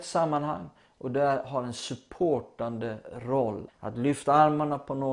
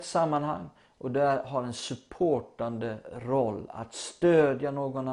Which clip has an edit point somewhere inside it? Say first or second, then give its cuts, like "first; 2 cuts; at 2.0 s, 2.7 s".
first; 1 cut; at 3.7 s